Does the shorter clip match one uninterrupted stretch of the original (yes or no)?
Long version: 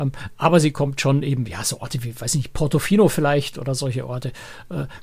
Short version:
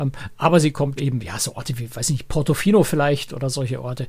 no